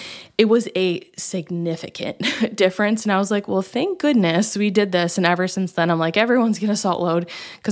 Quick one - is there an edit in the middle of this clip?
no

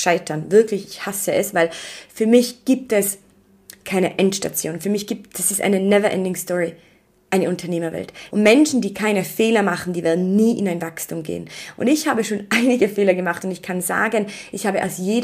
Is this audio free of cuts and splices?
no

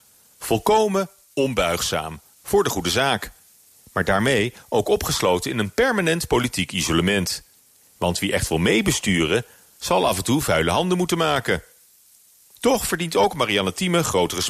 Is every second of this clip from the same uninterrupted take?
yes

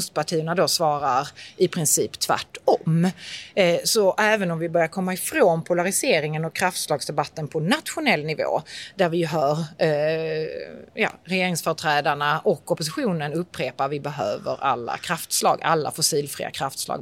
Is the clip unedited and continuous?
yes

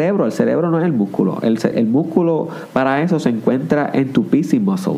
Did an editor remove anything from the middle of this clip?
yes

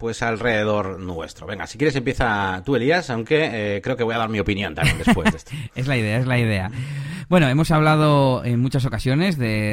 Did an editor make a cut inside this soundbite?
no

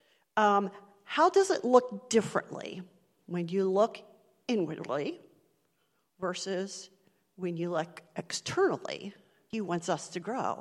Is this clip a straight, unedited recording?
no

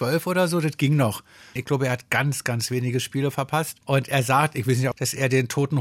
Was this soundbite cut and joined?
yes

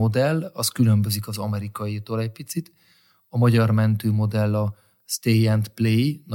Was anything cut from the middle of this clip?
no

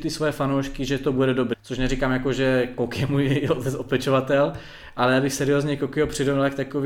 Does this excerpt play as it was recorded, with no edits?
no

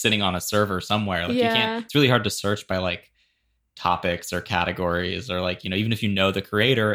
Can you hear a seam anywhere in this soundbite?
no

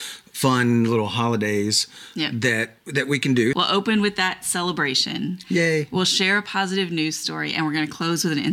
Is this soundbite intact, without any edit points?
no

